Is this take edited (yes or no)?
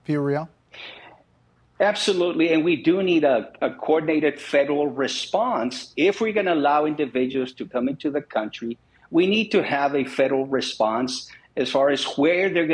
no